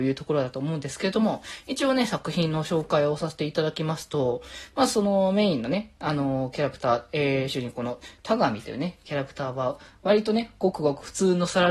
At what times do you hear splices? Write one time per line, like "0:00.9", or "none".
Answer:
none